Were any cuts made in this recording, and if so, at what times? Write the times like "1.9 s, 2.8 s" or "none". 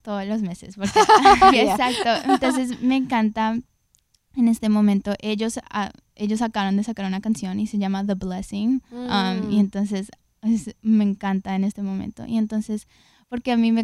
1.5 s